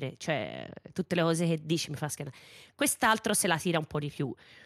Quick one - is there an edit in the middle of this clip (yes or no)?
no